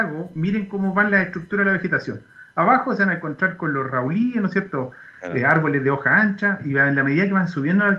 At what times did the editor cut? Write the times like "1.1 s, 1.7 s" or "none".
none